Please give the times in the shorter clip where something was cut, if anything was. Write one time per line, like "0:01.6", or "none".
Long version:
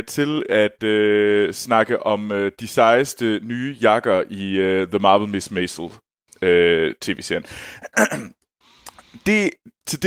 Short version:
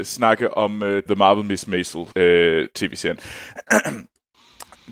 0:01.1
0:02.1